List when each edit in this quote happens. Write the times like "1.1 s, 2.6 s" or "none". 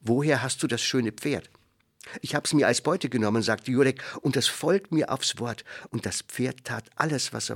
5.9 s